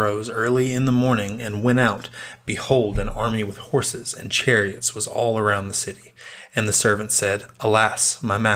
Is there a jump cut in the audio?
no; 0 cuts

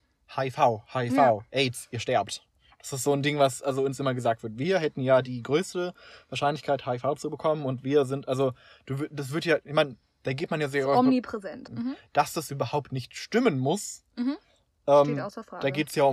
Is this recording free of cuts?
no; 1 cut; at 11.7 s

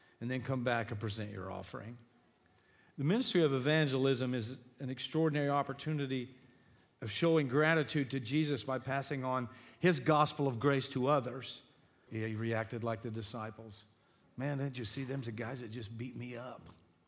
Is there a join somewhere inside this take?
yes; 1 cut; at 12.1 s

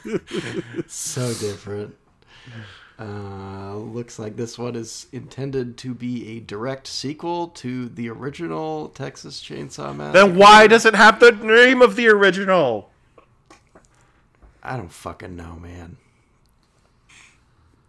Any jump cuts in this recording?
no; 0 cuts

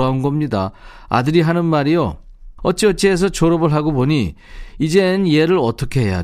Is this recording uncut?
no; 1 cut; at 2.6 s

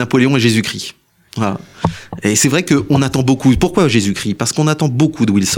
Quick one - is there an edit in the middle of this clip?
no; 0 cuts

